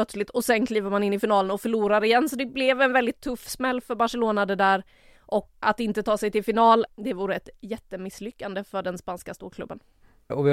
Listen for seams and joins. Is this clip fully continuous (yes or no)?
no